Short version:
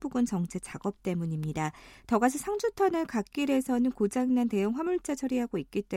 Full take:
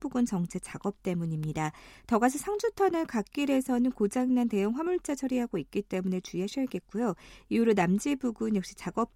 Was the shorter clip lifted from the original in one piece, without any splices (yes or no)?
yes